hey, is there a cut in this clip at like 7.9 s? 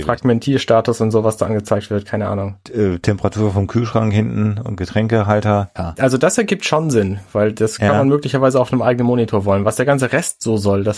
no; 2 cuts; at 2.7 s, 5.8 s

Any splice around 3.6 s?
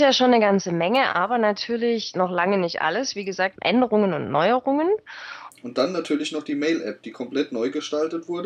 yes; 2 cuts; at 3.6 s, 5.5 s

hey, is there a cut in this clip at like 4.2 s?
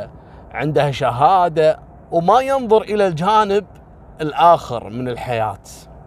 yes; 1 cut; at 4.2 s

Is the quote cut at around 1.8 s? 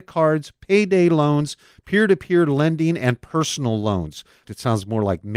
no; 1 cut; at 4.4 s

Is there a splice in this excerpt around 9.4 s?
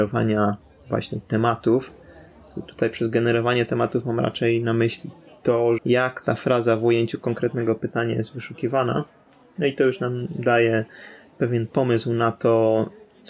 no; 1 cut; at 5.8 s

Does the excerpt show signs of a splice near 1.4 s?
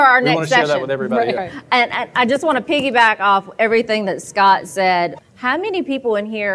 yes; 2 cuts; at 1.4 s, 5.2 s

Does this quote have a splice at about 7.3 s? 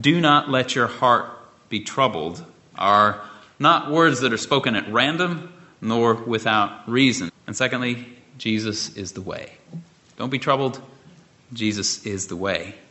yes; 1 cut; at 7.3 s

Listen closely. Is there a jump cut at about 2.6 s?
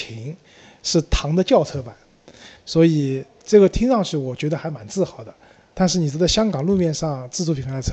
yes; 1 cut; at 2.6 s

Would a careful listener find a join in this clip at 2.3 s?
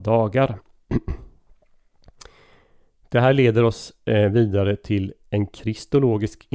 no; 0 cuts

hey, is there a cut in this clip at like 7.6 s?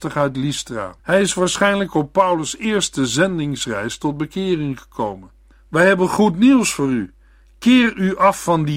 no; 2 cuts; at 1.0 s, 5.5 s

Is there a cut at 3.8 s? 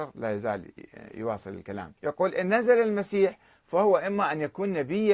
no; 1 cut; at 2.0 s

